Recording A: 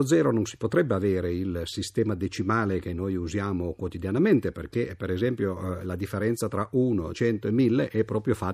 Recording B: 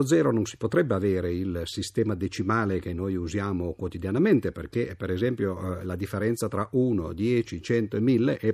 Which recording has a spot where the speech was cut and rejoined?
A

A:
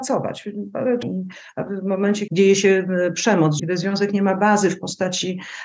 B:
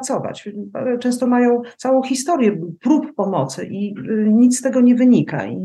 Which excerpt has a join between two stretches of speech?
A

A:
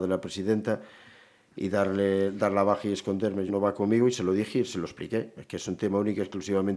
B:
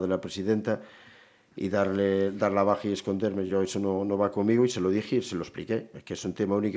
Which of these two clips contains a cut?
A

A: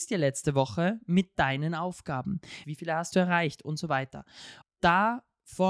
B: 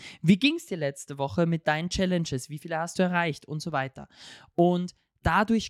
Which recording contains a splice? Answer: A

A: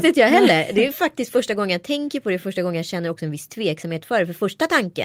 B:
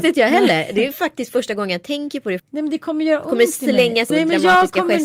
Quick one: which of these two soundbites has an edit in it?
B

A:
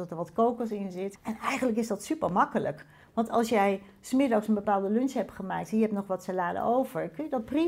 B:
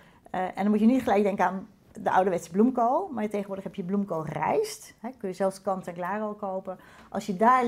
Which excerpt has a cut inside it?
A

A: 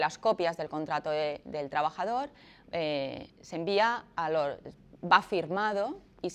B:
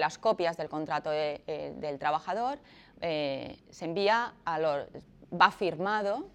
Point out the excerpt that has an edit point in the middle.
A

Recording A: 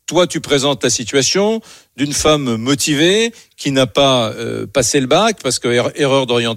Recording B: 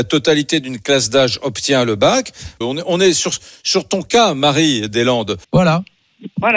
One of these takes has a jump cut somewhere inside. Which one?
B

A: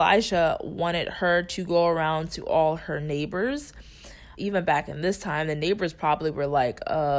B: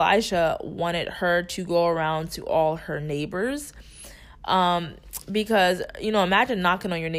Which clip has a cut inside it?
A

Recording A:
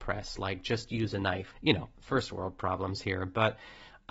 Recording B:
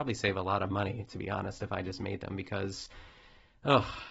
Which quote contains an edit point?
A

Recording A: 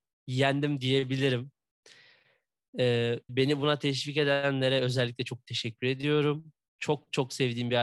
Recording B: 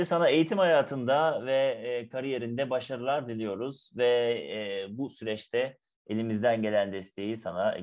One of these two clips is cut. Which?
A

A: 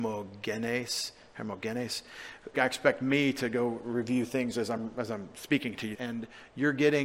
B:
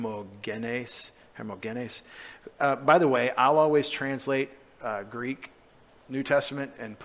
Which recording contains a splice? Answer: A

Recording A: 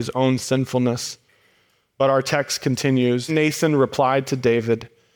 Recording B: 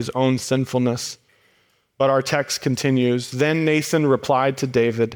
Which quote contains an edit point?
A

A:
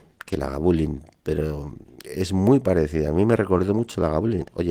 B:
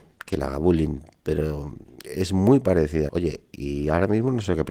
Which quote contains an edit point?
B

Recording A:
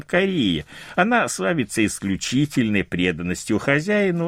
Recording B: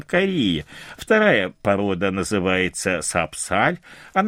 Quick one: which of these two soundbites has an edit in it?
B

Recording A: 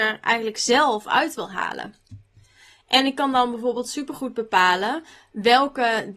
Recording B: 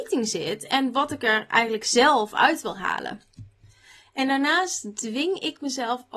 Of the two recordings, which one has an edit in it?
A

